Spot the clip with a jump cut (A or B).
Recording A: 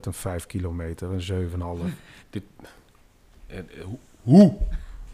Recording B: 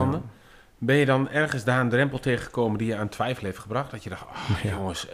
A